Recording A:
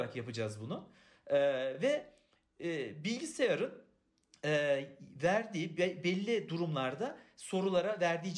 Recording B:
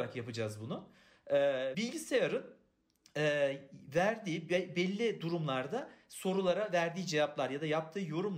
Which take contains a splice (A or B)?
B